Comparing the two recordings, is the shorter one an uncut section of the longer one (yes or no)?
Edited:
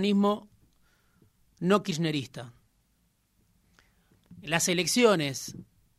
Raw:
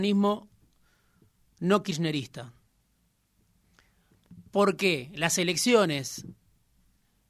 no